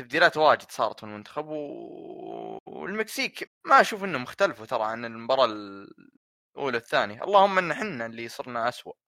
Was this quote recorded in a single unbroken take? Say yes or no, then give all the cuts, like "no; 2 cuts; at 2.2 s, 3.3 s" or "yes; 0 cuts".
no; 1 cut; at 3.5 s